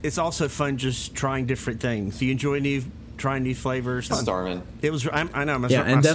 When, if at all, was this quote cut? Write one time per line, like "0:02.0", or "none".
0:02.1
0:04.1